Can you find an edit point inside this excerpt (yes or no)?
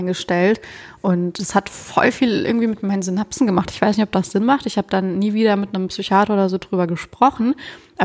no